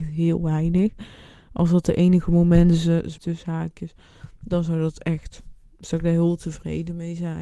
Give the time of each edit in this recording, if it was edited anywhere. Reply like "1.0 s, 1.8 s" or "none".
3.2 s

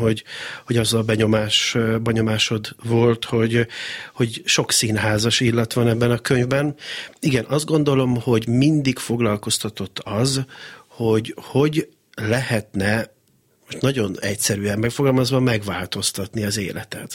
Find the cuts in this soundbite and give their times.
none

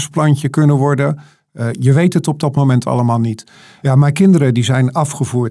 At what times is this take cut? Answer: none

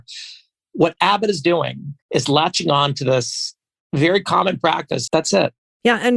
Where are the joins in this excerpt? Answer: 2.0 s, 5.1 s

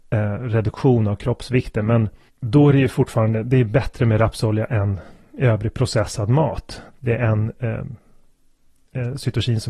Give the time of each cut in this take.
6.9 s

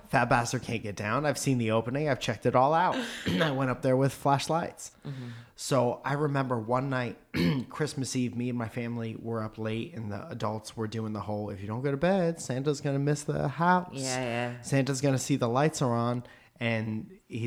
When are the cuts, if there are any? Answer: 4.9 s

